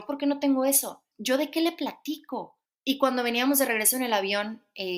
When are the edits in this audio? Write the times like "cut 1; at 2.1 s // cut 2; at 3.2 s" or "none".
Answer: cut 1; at 1.1 s // cut 2; at 2.8 s